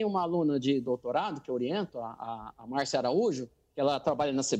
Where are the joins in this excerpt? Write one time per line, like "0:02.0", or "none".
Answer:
none